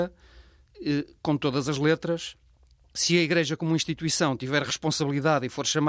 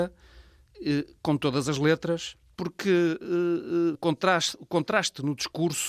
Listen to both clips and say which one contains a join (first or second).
second